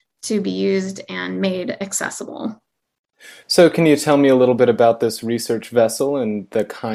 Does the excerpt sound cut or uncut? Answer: uncut